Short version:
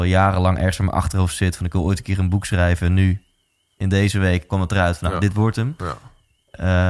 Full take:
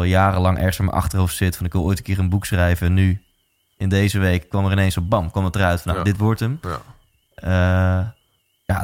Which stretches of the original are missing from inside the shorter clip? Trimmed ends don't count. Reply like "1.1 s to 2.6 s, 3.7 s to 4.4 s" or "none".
4.5 s to 5.3 s